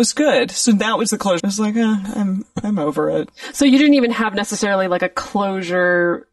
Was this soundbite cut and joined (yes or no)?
yes